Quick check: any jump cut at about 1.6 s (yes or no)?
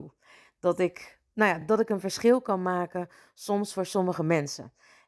no